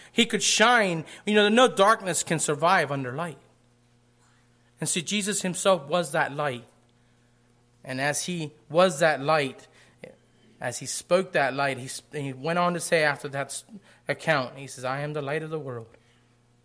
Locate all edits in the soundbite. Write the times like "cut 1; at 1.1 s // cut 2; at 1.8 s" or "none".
none